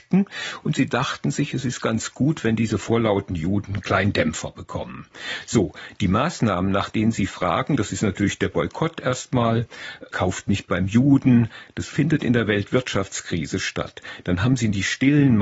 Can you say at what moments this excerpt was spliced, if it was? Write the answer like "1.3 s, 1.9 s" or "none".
none